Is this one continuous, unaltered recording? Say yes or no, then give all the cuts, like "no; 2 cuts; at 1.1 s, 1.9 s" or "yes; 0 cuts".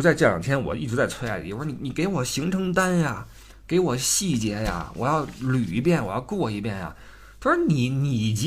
yes; 0 cuts